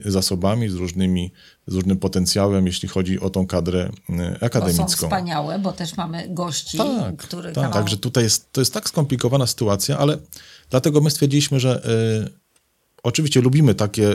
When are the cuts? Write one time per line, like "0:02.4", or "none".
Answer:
0:07.7